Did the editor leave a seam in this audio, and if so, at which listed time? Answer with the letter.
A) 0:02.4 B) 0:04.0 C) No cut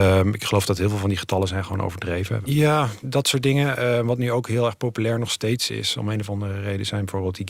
A